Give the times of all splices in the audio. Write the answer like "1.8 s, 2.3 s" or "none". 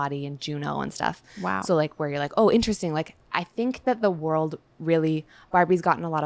none